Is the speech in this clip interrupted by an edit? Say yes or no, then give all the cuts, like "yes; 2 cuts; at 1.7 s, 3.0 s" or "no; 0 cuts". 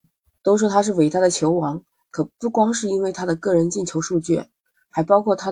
no; 0 cuts